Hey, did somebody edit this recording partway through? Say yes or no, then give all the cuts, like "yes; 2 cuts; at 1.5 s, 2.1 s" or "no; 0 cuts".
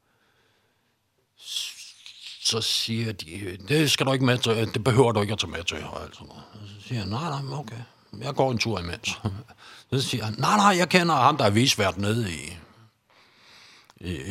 no; 0 cuts